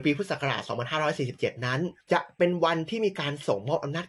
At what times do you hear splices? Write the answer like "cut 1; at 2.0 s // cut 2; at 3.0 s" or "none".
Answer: cut 1; at 2.0 s